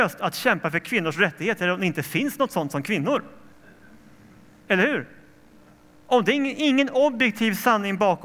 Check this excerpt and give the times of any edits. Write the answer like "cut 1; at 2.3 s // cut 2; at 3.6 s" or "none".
none